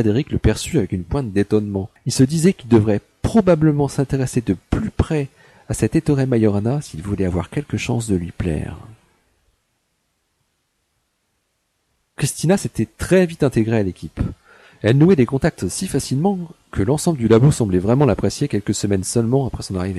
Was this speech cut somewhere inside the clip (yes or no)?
yes